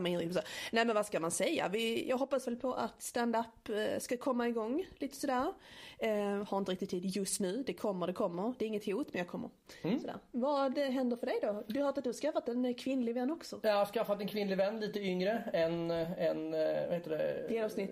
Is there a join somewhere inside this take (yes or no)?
no